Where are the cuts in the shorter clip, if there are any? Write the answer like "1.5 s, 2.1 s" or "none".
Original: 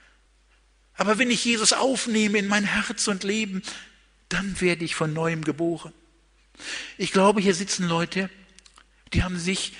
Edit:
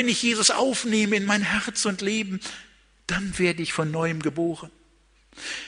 none